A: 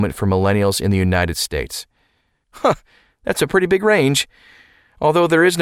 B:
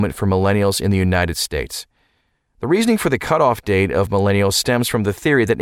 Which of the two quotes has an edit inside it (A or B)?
A